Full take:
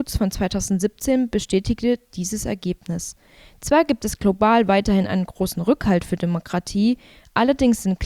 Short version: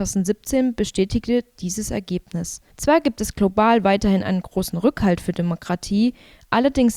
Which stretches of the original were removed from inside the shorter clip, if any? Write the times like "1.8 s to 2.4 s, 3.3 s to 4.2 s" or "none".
3.2 s to 3.5 s